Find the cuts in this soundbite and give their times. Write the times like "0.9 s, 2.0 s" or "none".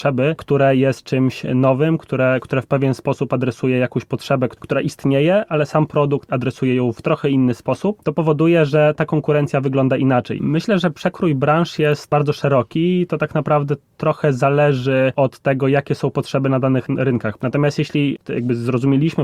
10.4 s, 17.4 s